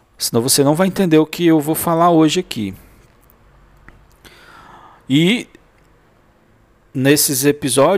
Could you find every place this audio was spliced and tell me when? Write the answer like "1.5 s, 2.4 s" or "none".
none